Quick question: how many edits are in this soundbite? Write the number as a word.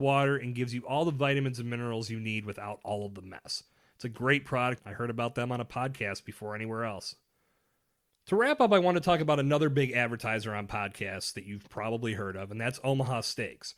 one